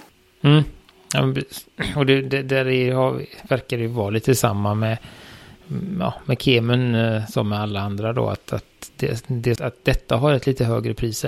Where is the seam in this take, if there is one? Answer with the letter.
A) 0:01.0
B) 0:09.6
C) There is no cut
B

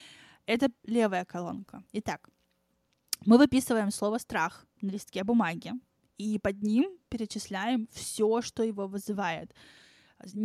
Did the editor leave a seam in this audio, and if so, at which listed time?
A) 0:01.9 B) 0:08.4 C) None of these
A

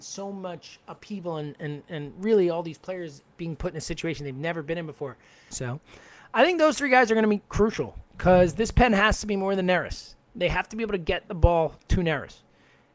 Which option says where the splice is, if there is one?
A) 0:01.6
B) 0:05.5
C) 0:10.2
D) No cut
B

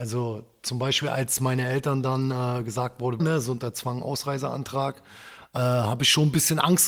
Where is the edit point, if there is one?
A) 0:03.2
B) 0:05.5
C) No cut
A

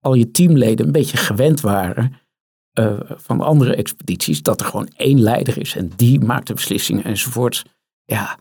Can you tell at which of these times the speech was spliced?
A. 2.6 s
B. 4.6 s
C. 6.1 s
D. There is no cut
D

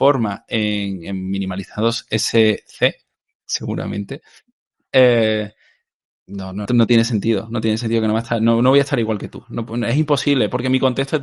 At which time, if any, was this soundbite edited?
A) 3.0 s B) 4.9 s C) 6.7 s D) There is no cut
C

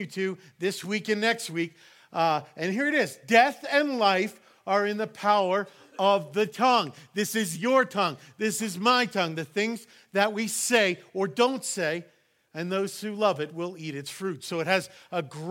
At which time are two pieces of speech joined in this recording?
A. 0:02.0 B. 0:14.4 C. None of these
C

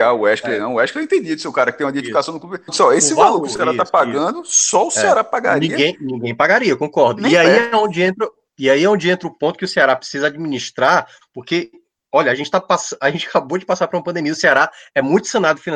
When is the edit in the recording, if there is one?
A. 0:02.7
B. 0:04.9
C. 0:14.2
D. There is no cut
A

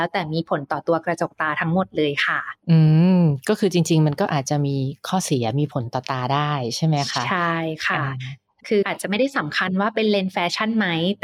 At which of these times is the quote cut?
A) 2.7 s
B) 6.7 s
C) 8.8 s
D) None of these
C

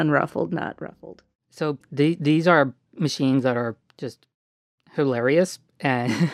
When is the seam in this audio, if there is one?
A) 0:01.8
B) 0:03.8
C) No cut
A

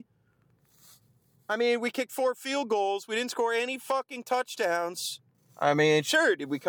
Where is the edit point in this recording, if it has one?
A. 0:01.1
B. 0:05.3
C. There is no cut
B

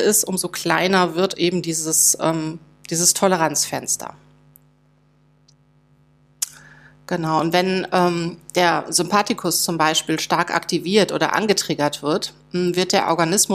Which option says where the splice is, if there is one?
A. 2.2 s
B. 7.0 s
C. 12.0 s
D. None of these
D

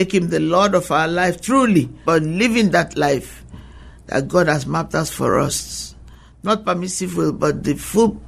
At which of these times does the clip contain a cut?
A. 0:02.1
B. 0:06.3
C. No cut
A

